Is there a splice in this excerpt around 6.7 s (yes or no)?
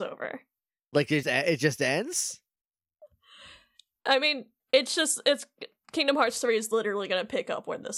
no